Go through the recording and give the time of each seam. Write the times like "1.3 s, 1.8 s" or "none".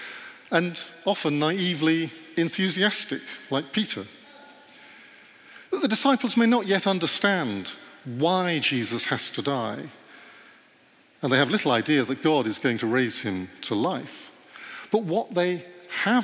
none